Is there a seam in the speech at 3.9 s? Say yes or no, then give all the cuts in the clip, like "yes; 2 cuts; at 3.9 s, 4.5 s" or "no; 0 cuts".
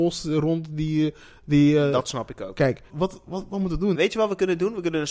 yes; 2 cuts; at 2.9 s, 3.9 s